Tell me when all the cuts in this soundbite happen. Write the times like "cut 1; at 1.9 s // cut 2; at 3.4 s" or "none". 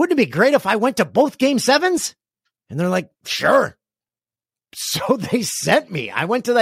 none